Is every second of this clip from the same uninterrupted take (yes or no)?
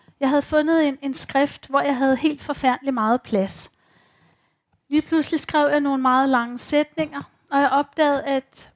yes